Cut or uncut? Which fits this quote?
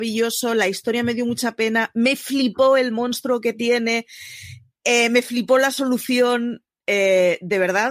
uncut